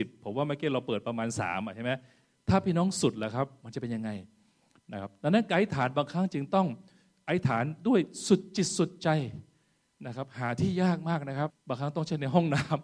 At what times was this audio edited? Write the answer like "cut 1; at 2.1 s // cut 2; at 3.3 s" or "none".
cut 1; at 11.5 s